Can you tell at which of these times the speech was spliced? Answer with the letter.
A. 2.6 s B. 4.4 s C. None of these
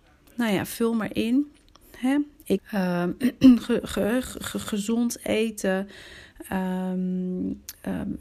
A